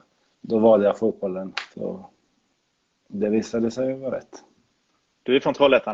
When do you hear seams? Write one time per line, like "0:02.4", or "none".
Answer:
0:01.7